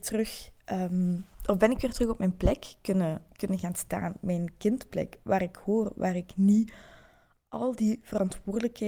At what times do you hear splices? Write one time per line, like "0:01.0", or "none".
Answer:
none